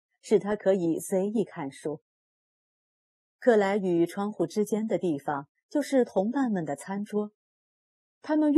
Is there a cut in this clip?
no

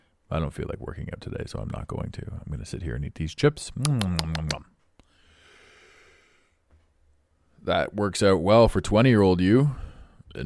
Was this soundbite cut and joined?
no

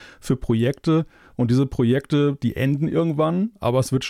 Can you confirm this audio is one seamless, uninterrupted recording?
yes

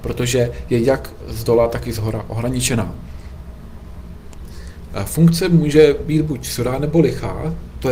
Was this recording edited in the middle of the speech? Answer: yes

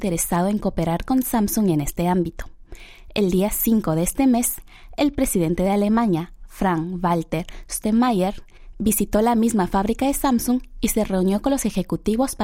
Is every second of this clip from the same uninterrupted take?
yes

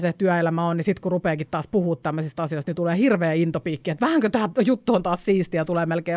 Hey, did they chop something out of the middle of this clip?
no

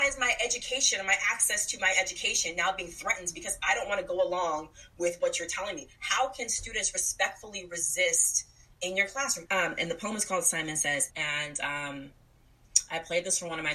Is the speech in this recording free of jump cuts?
no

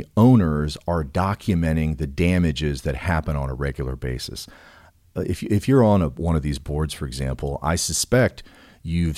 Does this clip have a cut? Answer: no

